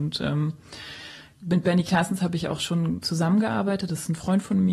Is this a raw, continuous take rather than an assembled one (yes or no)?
yes